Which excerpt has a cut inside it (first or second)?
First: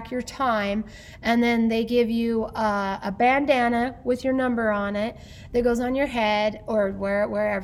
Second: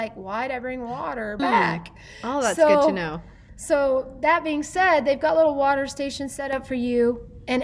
second